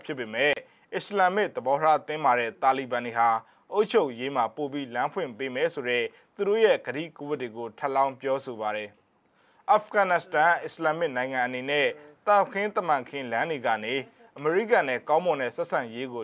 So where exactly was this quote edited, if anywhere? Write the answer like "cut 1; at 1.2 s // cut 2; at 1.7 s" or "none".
none

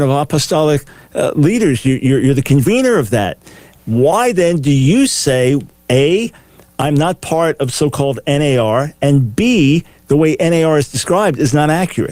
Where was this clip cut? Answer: cut 1; at 3.8 s

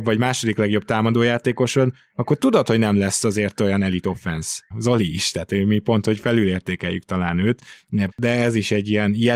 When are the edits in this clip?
cut 1; at 4.7 s // cut 2; at 8.1 s

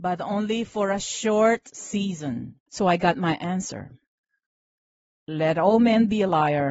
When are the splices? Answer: cut 1; at 2.7 s

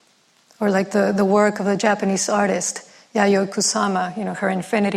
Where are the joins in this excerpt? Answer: none

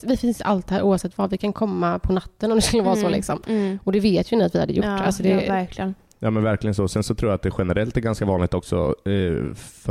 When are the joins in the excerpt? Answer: none

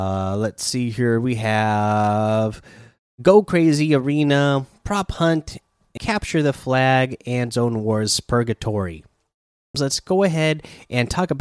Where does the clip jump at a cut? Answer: cut 1; at 6.0 s // cut 2; at 9.7 s

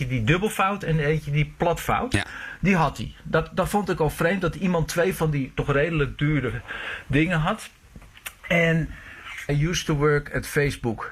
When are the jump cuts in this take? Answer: cut 1; at 9.5 s

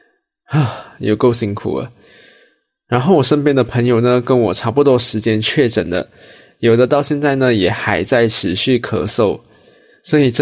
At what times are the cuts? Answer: none

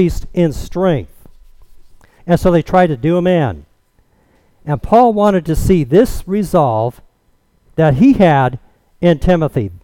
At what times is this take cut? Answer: cut 1; at 2.2 s

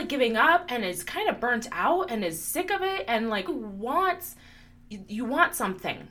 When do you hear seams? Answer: cut 1; at 3.5 s

